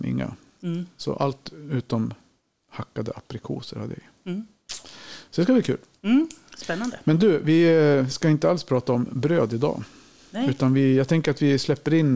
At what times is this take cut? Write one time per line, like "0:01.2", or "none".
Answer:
none